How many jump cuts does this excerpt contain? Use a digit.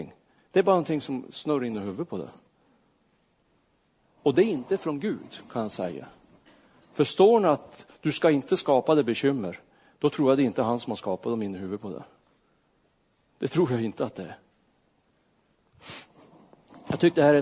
0